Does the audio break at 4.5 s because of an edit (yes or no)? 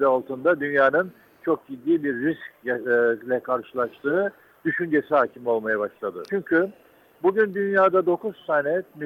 no